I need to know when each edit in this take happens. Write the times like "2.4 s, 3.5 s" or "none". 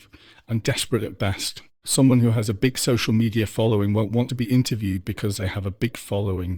1.8 s